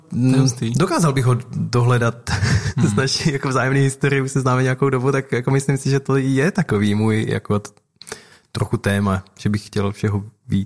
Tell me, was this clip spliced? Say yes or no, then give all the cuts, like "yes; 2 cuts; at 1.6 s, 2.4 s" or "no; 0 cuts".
no; 0 cuts